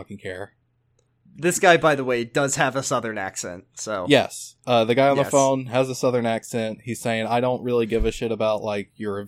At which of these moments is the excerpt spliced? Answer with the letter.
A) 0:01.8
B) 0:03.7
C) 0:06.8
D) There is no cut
D